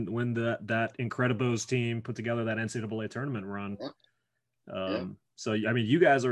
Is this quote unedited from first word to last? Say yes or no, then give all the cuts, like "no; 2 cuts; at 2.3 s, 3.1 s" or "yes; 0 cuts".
yes; 0 cuts